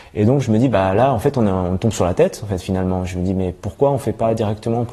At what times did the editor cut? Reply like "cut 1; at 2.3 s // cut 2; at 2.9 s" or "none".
none